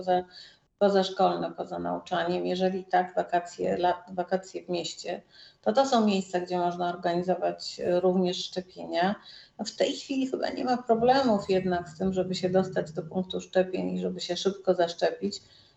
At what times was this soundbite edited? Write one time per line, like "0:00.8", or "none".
none